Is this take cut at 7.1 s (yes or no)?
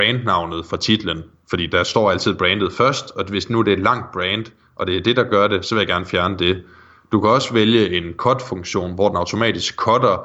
no